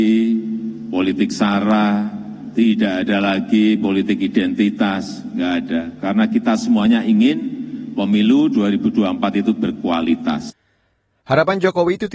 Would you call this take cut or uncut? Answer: uncut